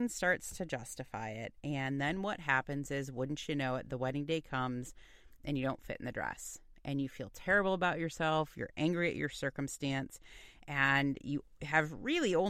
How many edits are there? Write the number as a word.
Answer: one